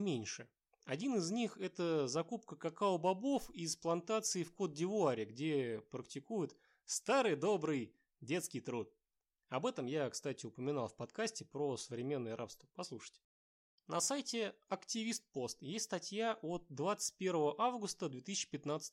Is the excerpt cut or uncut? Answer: cut